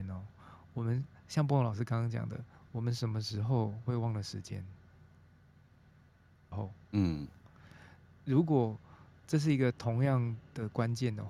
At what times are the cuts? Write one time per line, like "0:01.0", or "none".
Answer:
0:06.5